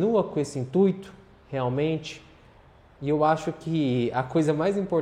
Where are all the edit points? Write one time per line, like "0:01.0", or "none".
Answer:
0:03.0